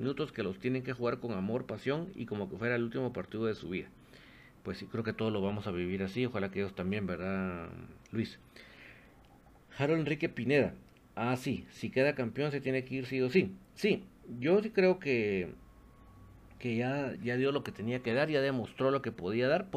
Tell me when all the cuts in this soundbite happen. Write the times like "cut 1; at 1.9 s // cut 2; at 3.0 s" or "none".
cut 1; at 17.2 s